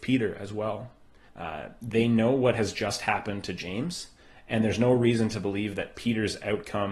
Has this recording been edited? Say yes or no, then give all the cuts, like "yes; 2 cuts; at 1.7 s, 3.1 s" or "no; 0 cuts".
yes; 1 cut; at 1.3 s